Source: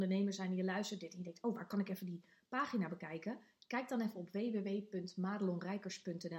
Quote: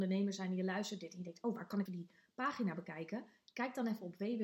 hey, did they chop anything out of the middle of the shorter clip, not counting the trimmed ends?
yes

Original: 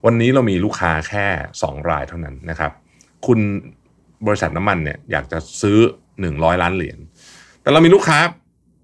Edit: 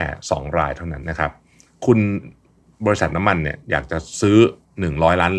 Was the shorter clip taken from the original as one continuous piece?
no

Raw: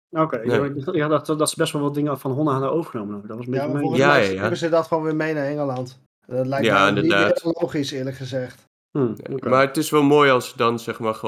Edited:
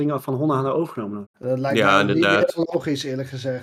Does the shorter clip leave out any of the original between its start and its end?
yes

